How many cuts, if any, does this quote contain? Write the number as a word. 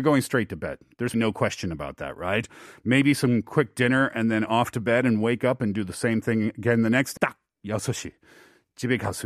two